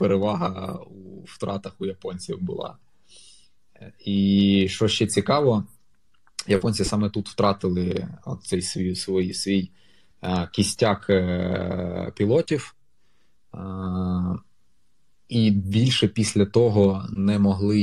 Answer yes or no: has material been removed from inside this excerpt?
no